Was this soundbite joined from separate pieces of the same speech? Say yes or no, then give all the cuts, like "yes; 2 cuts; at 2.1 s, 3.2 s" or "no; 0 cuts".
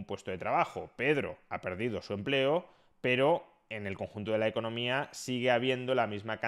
no; 0 cuts